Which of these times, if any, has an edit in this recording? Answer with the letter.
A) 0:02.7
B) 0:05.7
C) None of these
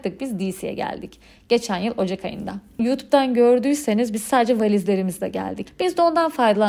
B